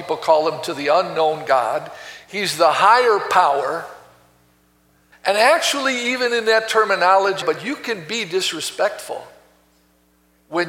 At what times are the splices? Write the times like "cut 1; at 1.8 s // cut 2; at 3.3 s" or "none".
cut 1; at 5.1 s // cut 2; at 7.4 s